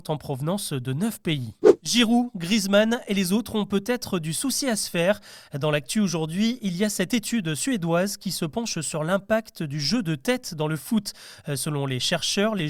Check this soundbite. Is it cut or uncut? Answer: uncut